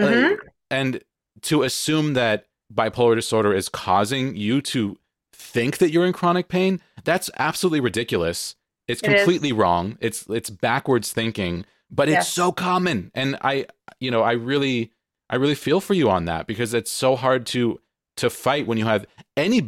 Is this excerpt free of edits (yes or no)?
yes